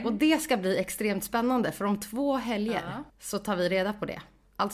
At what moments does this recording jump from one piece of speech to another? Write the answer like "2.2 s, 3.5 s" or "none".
3.1 s